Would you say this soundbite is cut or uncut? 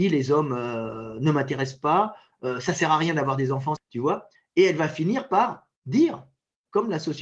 cut